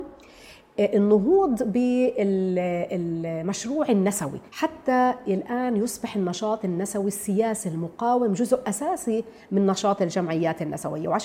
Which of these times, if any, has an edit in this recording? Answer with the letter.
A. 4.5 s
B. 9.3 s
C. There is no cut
A